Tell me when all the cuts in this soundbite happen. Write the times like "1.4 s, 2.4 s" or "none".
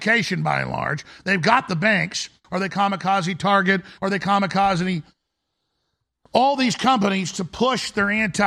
2.4 s, 4.0 s